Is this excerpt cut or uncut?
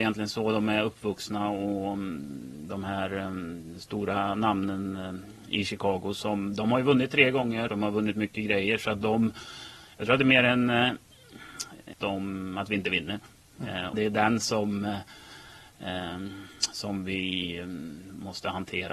cut